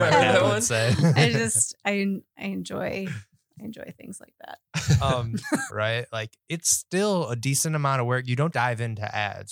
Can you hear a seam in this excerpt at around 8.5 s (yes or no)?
yes